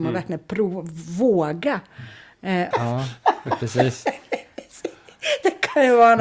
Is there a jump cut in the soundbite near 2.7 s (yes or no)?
yes